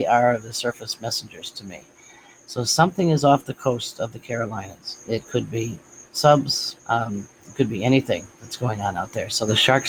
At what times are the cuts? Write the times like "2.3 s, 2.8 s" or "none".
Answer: 6.8 s

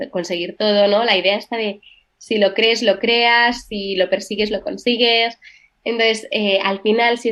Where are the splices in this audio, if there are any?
none

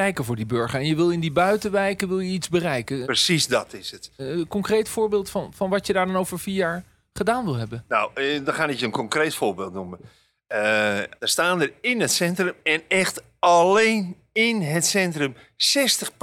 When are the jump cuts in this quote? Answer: 3.0 s, 4.2 s, 11.2 s

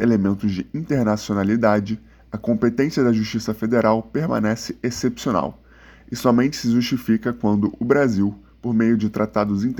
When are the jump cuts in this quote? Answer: none

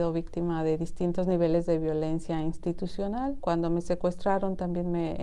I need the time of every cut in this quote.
3.4 s

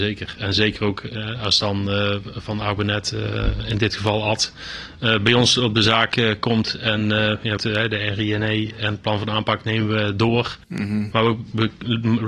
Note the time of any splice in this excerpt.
7.6 s

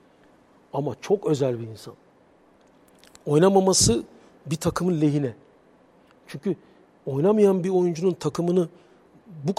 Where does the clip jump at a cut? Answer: none

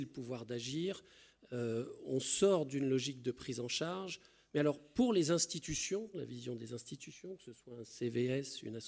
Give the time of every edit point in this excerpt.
4.5 s, 6.1 s

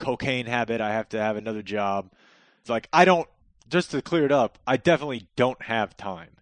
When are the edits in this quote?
2.6 s

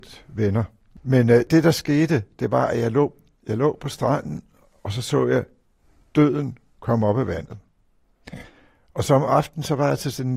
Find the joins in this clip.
none

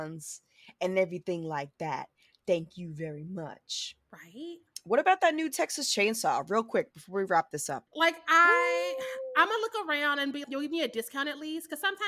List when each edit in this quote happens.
7.9 s, 10.4 s

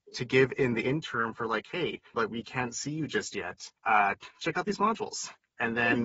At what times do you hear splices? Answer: 2.1 s, 3.8 s

